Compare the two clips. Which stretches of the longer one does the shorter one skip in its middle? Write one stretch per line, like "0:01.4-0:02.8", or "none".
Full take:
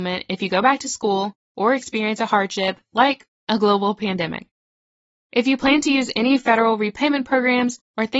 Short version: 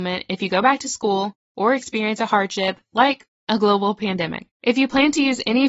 0:04.5-0:05.2

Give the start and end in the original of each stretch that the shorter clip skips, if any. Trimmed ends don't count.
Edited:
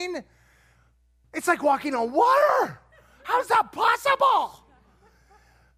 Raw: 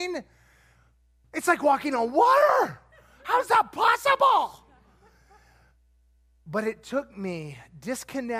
none

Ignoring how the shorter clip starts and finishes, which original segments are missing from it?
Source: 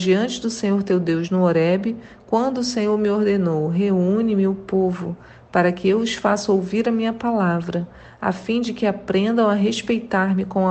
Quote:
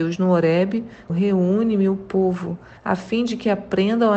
0:02.2-0:03.7
0:05.4-0:08.1

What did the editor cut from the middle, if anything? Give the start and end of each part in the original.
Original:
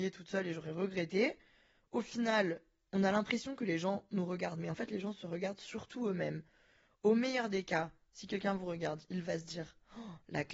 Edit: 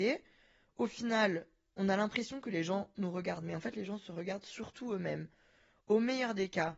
none

